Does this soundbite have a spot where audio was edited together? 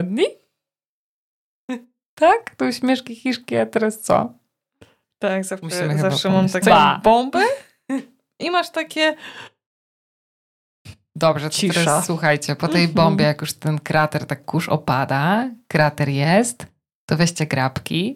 yes; 1 cut; at 6.6 s

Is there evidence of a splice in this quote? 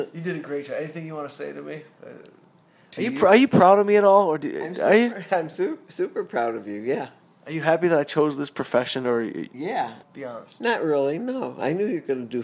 yes; 1 cut; at 10.0 s

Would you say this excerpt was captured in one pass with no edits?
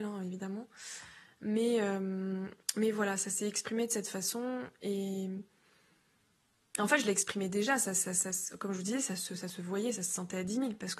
yes; 0 cuts

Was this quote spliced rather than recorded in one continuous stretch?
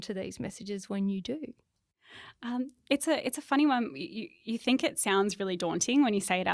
no; 0 cuts

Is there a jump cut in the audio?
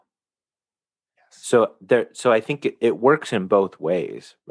no; 0 cuts

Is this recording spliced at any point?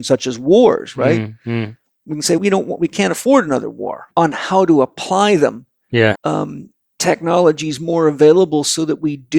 yes; 3 cuts; at 2.4 s, 4.1 s, 6.1 s

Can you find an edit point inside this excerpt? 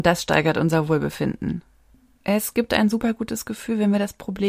no; 0 cuts

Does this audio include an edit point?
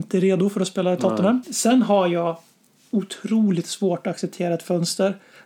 yes; 1 cut; at 1.4 s

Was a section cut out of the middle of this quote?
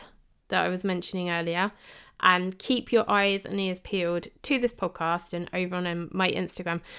no; 0 cuts

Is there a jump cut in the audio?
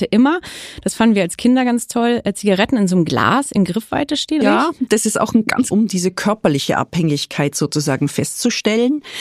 yes; 2 cuts; at 4.4 s, 5.7 s

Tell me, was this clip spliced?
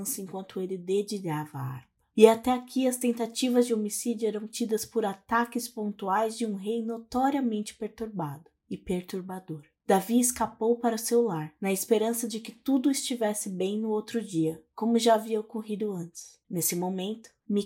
yes; 1 cut; at 16.4 s

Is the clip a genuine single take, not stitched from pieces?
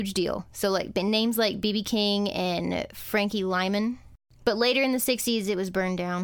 yes; 0 cuts

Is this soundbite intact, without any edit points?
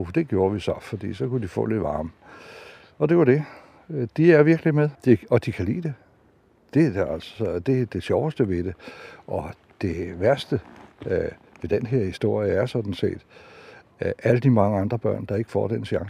no; 1 cut; at 5.0 s

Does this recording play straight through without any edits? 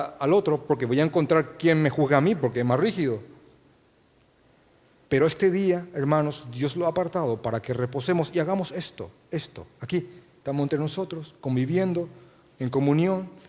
yes; 0 cuts

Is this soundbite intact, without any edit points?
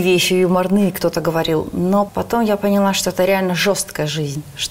no; 1 cut; at 2.1 s

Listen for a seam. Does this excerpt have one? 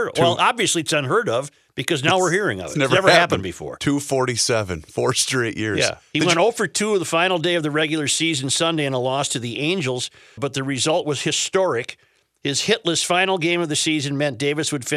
yes; 1 cut; at 10.4 s

